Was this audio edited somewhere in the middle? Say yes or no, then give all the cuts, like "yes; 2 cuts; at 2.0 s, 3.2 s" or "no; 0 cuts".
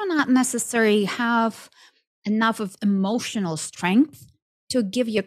no; 0 cuts